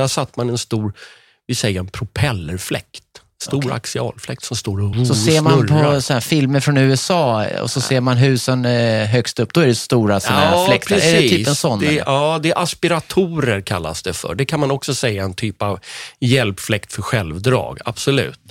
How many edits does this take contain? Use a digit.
1